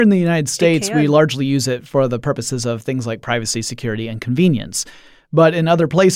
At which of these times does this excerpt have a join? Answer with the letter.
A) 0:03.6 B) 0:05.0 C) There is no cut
C